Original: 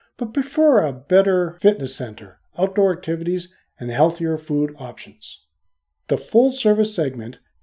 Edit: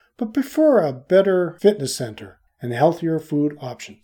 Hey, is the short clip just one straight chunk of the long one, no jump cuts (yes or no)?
no